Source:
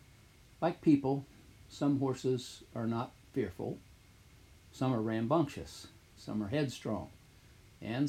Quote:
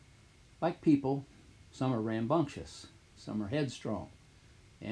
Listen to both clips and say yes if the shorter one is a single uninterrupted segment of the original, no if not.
no